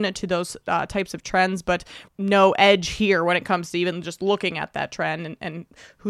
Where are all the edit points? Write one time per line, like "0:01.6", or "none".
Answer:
0:02.1